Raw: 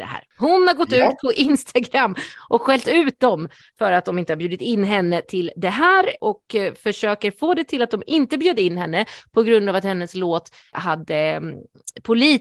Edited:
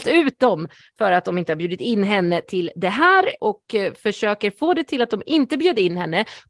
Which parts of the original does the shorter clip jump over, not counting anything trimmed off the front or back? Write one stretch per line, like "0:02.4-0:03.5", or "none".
none